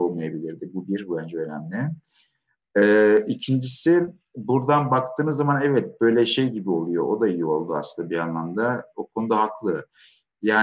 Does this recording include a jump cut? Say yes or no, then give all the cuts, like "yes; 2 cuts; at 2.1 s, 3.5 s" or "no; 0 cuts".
no; 0 cuts